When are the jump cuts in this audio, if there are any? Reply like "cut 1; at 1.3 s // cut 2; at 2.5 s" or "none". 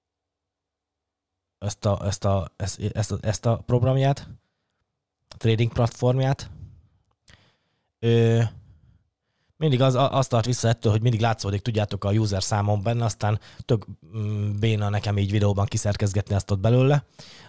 none